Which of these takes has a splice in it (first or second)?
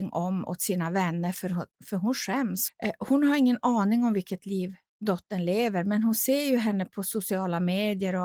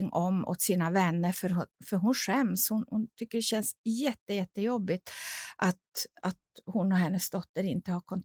first